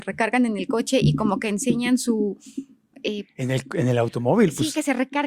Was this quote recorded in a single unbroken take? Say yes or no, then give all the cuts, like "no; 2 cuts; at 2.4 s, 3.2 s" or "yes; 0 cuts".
yes; 0 cuts